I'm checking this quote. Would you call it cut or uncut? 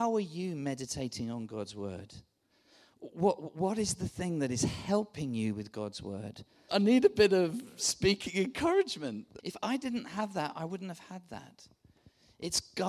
cut